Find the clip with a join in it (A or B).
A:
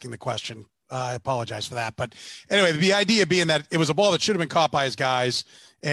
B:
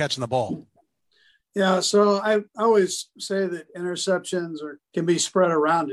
B